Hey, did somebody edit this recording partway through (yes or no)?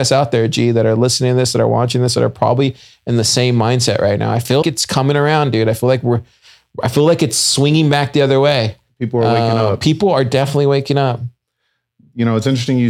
yes